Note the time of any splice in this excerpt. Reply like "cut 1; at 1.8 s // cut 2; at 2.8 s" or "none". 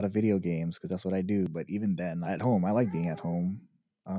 cut 1; at 2.2 s